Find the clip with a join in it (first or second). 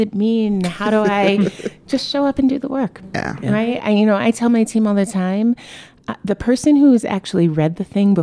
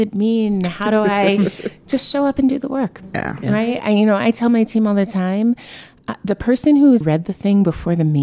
second